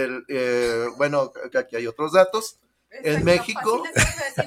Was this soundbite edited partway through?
yes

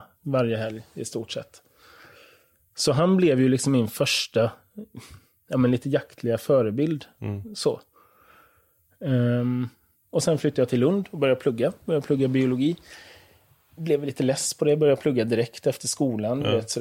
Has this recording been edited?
no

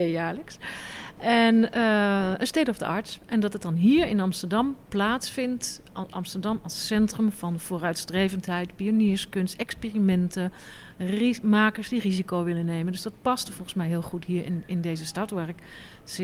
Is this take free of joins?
yes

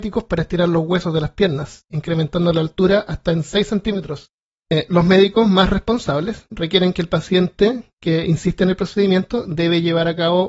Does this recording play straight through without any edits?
yes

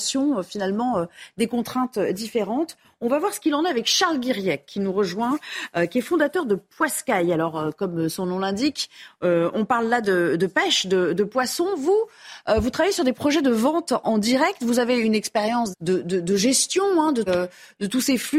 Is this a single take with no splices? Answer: no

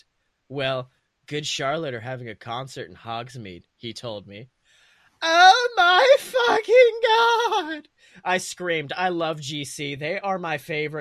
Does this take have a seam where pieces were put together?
no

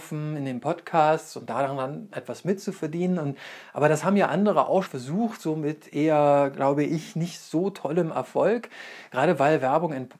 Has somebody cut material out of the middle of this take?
yes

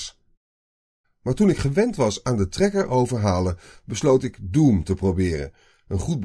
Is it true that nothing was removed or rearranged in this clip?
no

